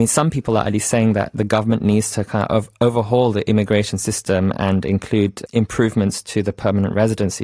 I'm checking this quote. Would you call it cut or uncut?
cut